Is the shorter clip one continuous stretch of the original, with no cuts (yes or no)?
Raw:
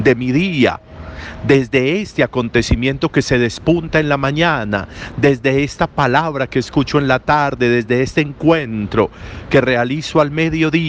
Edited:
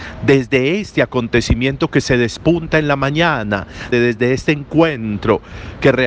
no